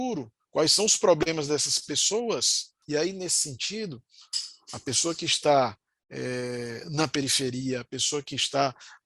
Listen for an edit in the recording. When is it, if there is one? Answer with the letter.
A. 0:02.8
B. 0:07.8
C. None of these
A